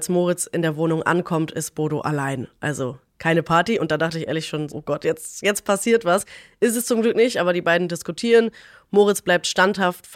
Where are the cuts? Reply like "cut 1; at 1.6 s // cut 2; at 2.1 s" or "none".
cut 1; at 4.7 s

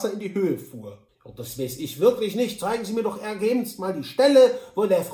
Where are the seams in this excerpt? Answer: cut 1; at 1.1 s

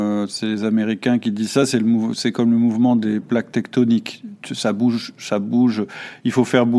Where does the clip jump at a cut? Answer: none

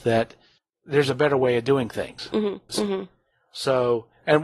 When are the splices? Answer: cut 1; at 2.7 s

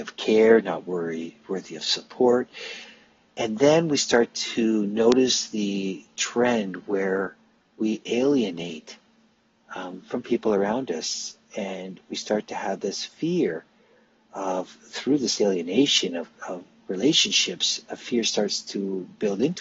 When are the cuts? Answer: none

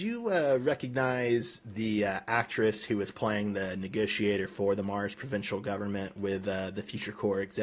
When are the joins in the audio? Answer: none

